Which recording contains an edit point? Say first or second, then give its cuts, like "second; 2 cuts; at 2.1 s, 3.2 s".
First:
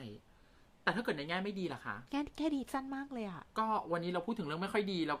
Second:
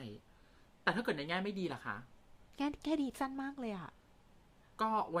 first; 2 cuts; at 2.1 s, 3.5 s